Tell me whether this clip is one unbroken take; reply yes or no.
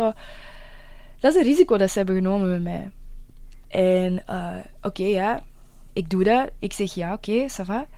no